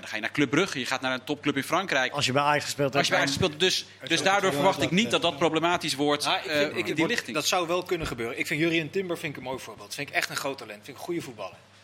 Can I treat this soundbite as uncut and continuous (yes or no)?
yes